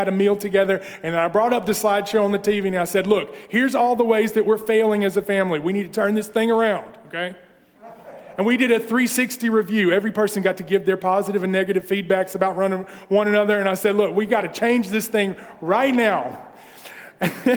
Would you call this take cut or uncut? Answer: uncut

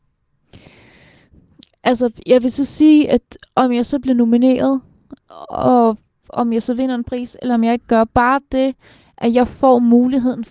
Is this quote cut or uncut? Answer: uncut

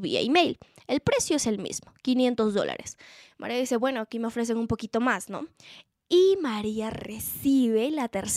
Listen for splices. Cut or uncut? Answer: uncut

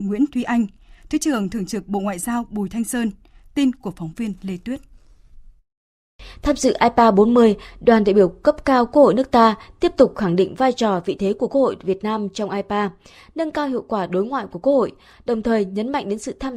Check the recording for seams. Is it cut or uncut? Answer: uncut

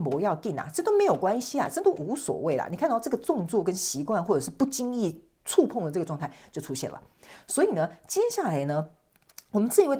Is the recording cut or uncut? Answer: uncut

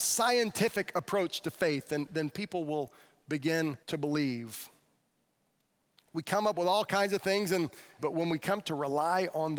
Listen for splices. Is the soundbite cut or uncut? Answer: cut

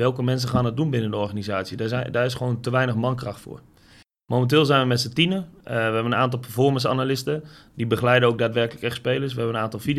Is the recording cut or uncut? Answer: uncut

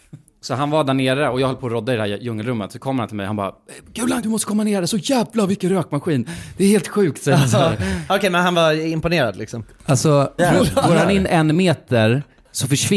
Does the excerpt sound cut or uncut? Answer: cut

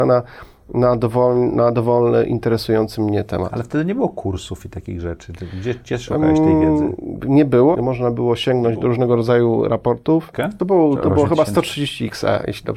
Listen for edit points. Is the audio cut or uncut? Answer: cut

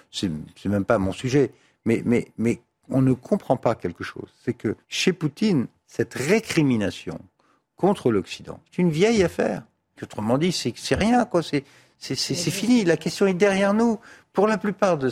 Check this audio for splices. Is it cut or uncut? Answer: cut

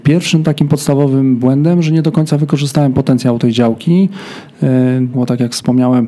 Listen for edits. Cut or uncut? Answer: cut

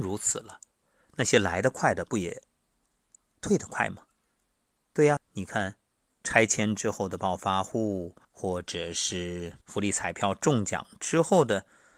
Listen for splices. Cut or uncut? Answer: cut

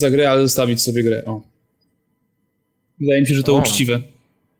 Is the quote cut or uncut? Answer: uncut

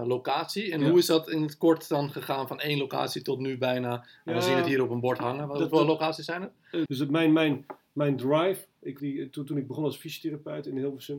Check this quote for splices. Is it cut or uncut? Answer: cut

